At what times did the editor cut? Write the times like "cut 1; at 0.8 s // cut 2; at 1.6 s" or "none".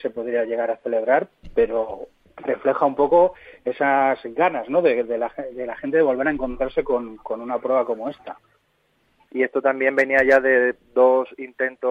cut 1; at 9.3 s